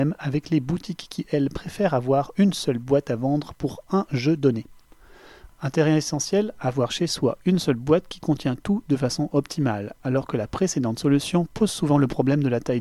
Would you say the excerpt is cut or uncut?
cut